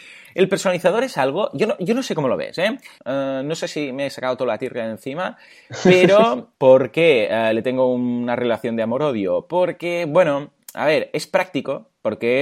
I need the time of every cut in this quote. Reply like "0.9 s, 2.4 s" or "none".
3.0 s, 6.5 s